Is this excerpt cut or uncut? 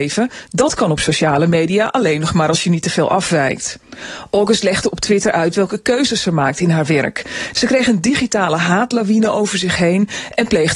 cut